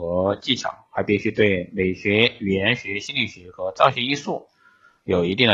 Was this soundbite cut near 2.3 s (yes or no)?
no